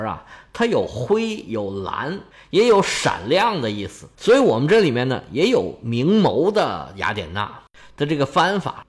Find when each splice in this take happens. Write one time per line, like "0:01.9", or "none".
none